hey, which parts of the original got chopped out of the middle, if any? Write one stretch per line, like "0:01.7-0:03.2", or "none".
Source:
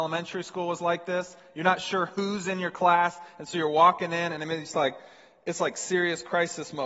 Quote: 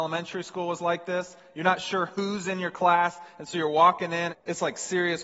0:04.3-0:05.3